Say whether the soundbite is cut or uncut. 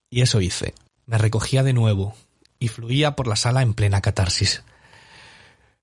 cut